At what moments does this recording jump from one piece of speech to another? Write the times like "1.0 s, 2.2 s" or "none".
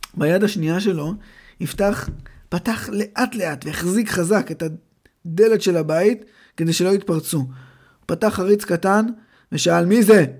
none